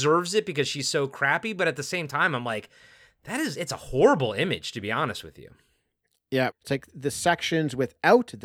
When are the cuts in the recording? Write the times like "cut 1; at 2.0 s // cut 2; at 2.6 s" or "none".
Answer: cut 1; at 6.5 s